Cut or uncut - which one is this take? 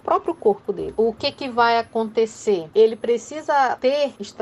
uncut